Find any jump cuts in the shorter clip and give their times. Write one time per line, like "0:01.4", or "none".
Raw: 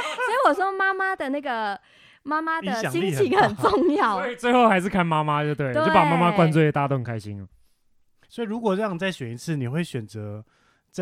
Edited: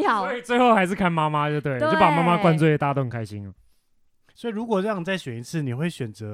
none